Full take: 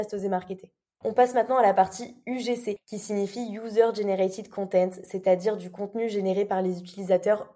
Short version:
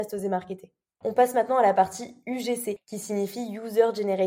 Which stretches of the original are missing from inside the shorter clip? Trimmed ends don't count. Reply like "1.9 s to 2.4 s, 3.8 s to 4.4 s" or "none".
none